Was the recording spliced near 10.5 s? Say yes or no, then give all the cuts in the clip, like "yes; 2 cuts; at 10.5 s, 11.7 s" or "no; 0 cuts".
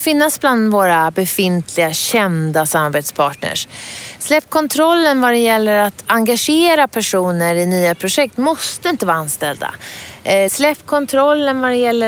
yes; 1 cut; at 10.5 s